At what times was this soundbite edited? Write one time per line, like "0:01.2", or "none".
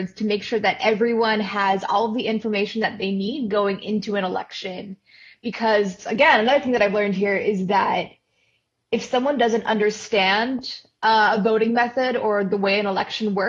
none